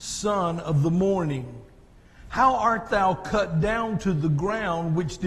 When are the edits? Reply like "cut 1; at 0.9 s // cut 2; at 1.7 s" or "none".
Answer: none